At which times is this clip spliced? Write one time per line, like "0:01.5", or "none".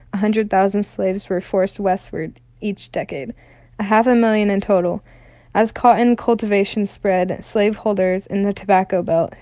none